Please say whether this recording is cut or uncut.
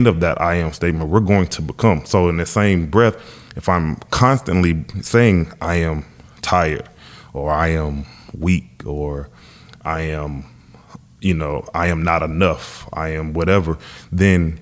uncut